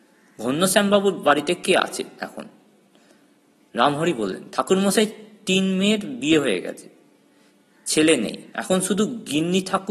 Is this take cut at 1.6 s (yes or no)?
yes